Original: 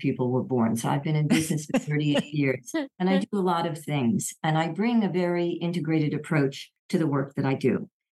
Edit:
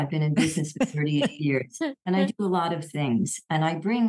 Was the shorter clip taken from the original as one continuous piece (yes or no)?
yes